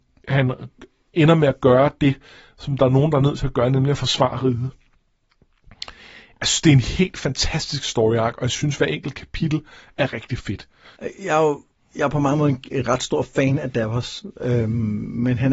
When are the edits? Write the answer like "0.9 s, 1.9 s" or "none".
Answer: 11.0 s